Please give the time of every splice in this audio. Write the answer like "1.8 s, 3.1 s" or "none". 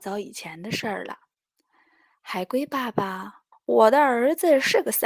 3.5 s